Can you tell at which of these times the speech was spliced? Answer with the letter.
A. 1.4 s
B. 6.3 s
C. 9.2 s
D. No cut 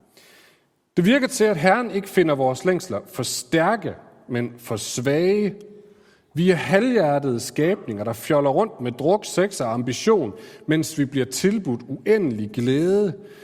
D